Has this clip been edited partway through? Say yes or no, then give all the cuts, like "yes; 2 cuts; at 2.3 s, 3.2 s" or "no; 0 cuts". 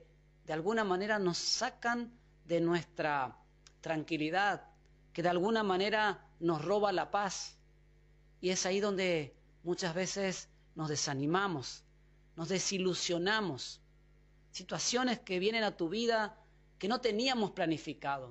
no; 0 cuts